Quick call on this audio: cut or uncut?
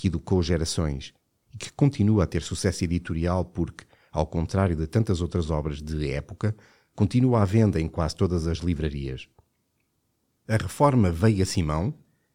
uncut